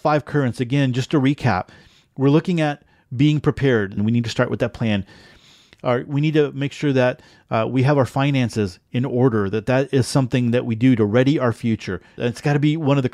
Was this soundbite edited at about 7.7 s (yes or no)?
no